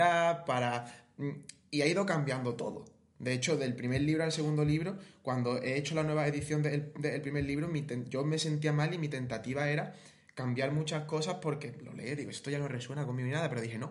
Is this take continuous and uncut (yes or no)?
yes